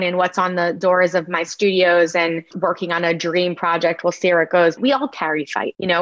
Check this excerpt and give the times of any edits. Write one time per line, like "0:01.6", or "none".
0:04.8